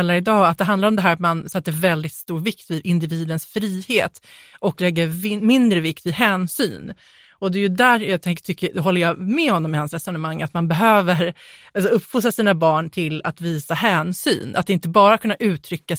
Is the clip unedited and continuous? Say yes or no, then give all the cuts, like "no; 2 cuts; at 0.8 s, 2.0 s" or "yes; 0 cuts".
yes; 0 cuts